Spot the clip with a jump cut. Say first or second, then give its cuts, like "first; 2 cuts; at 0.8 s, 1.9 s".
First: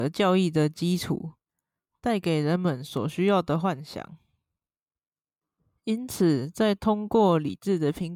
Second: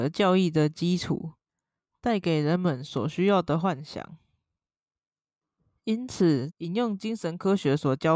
second; 1 cut; at 6.5 s